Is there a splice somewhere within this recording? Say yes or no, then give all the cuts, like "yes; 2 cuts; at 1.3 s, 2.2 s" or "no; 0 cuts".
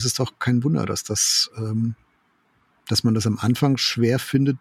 no; 0 cuts